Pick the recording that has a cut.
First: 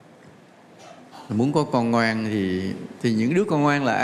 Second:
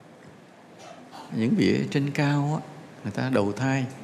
second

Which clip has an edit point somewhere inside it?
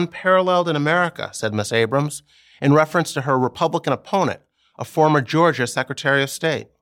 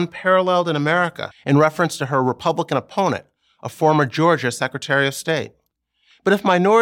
second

